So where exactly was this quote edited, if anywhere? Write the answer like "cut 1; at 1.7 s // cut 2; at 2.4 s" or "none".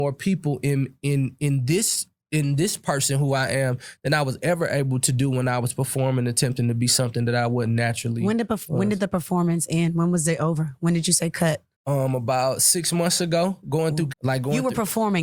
cut 1; at 11.7 s // cut 2; at 14.1 s